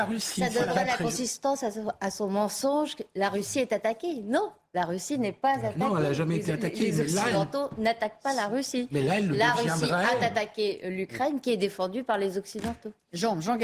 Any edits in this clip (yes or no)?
no